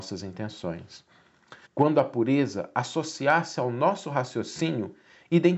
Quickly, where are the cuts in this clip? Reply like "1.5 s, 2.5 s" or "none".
1.7 s